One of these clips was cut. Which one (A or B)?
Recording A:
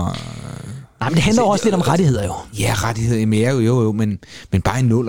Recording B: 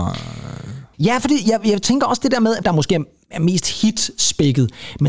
B